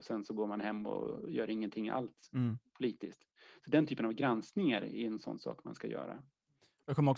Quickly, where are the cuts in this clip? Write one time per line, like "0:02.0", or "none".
none